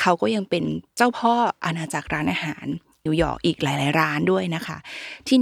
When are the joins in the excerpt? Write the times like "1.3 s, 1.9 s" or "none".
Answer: 3.1 s